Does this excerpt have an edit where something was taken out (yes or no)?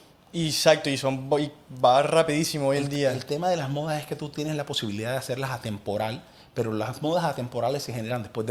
no